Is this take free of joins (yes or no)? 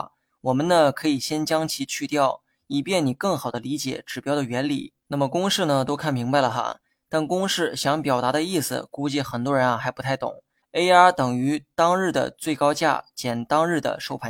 no